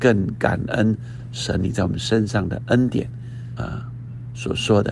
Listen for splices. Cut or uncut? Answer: cut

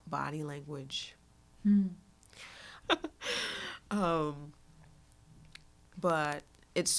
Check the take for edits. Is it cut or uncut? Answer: cut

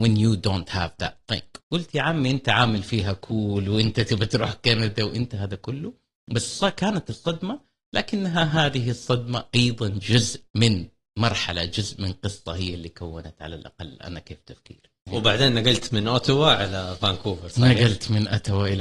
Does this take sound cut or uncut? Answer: cut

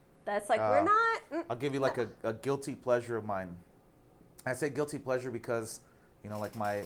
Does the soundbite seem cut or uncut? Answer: uncut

